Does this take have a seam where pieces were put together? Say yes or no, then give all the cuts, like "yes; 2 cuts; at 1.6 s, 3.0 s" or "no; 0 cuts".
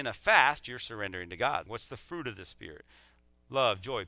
yes; 1 cut; at 1.7 s